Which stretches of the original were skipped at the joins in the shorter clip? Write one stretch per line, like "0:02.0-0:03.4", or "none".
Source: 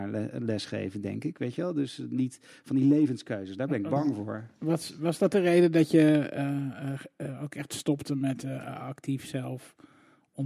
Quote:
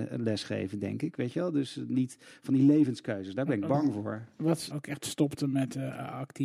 0:04.9-0:07.4